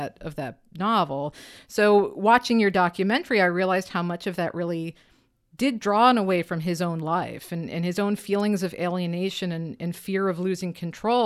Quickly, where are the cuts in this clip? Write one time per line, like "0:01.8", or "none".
none